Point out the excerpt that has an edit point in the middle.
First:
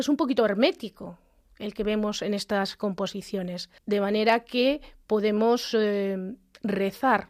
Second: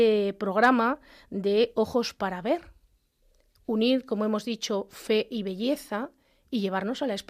first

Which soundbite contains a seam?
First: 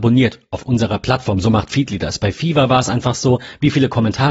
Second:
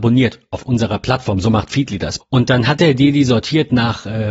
second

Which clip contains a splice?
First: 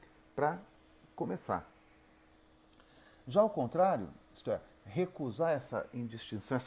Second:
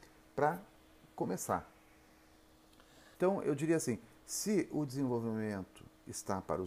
second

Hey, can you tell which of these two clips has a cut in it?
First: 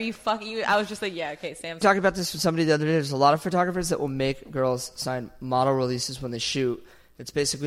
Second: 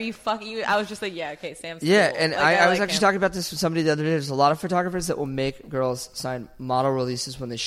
first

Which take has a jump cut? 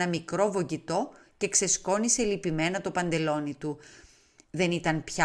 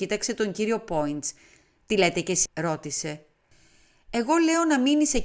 second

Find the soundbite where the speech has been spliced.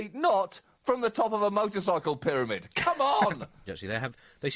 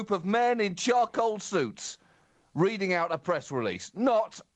first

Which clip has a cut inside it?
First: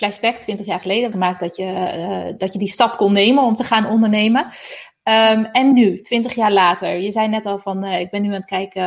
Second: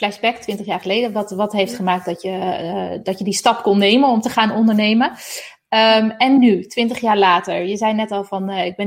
first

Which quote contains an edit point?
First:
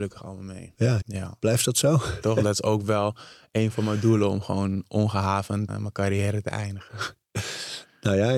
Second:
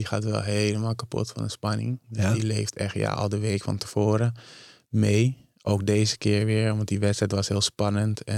first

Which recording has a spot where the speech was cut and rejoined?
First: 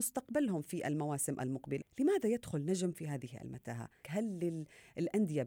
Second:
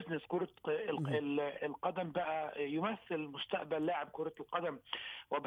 first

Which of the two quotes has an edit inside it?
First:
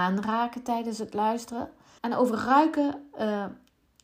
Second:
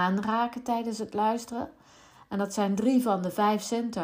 first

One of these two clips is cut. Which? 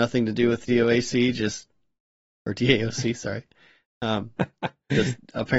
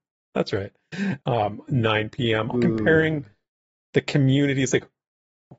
second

